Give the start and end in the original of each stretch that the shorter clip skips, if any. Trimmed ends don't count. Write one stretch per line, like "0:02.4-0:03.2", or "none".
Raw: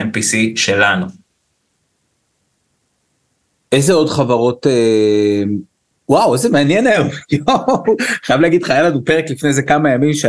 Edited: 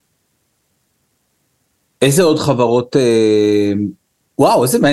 none